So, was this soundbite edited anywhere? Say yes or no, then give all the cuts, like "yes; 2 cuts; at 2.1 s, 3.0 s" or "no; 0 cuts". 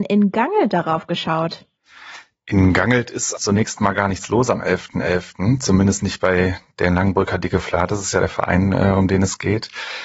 yes; 1 cut; at 3.4 s